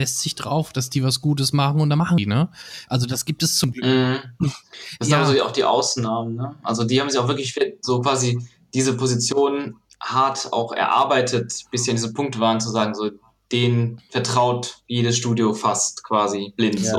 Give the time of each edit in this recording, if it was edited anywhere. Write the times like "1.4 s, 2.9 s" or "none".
none